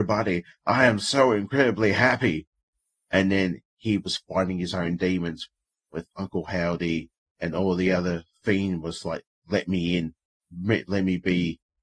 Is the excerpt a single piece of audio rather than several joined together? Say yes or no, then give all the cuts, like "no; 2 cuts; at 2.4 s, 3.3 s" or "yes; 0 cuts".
yes; 0 cuts